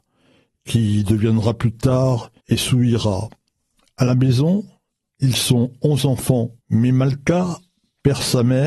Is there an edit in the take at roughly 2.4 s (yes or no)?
yes